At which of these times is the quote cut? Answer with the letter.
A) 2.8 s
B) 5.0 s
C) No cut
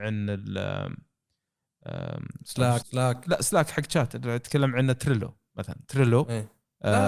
A